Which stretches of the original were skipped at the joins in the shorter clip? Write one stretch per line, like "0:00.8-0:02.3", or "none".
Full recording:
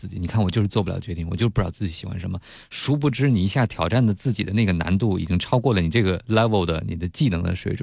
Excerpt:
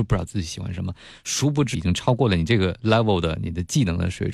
0:03.2-0:05.2

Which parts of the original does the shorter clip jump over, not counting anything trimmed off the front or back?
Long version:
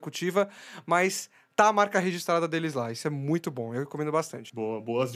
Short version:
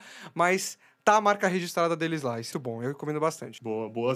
0:03.0-0:03.4

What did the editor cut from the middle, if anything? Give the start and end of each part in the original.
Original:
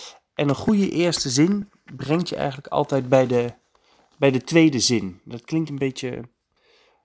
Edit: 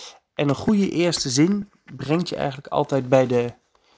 none

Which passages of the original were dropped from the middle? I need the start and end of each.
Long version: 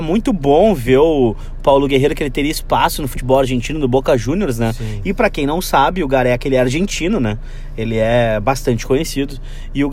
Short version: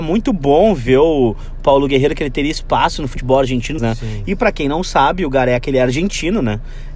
0:03.8-0:04.6

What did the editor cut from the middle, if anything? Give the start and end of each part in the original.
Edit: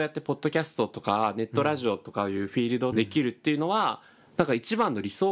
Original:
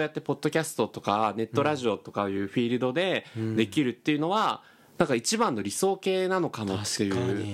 0:02.9-0:03.5

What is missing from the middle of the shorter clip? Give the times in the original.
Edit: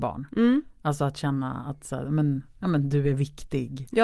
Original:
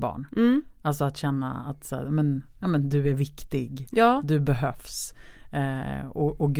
none

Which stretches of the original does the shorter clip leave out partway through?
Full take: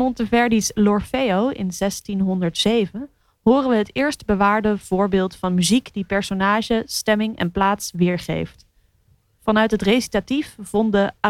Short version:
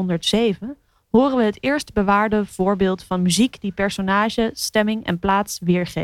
none

